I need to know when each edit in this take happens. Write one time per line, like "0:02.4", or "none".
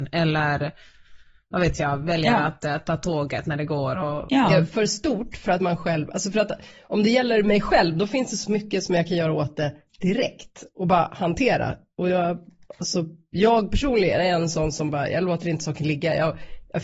0:04.5